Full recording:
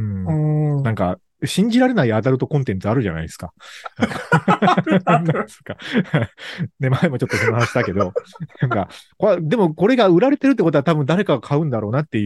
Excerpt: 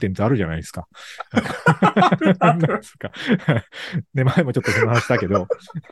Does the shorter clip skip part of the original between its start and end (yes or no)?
no